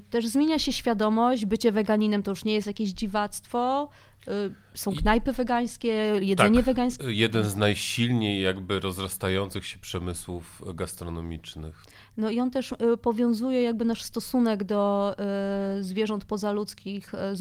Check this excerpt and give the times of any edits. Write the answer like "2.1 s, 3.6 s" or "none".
7.0 s